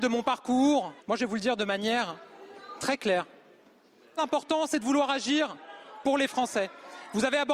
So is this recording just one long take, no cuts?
no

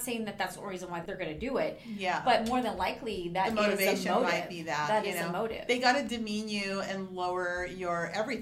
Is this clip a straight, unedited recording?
no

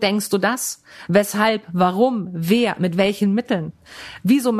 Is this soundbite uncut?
yes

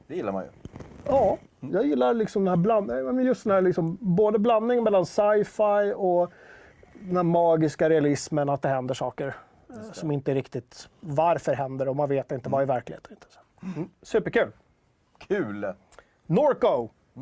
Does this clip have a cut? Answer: no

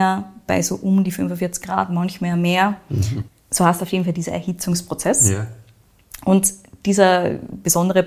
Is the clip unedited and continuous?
no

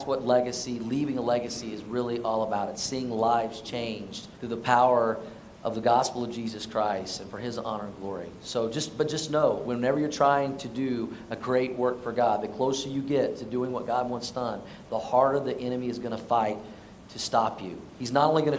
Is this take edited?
yes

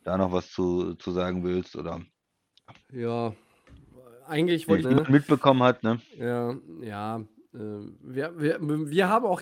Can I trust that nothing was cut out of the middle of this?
no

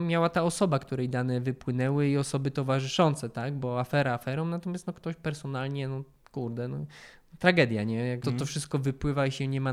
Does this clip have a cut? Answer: yes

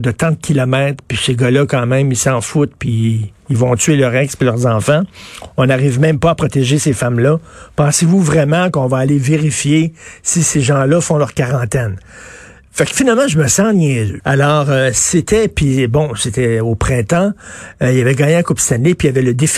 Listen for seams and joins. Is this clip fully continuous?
no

